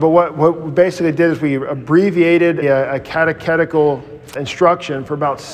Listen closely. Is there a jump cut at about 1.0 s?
no; 2 cuts; at 2.6 s, 4.3 s

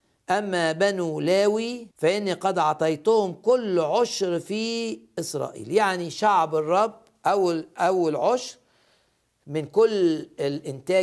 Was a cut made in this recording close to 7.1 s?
no; 1 cut; at 1.9 s

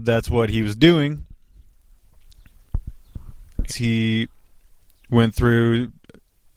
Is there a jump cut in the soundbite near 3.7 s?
yes; 1 cut; at 3.7 s

